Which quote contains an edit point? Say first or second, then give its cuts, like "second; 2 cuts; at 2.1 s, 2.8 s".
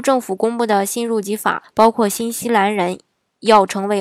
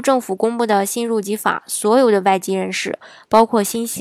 first; 1 cut; at 1.6 s